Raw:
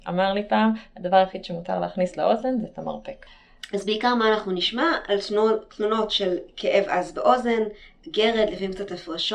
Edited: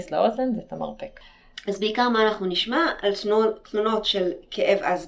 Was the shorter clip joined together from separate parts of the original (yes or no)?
no